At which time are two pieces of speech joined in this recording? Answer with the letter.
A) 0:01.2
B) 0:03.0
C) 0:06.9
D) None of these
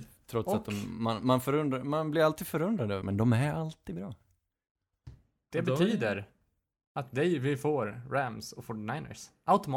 B